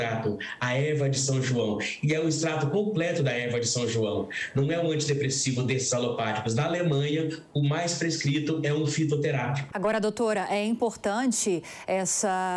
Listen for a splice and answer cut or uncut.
cut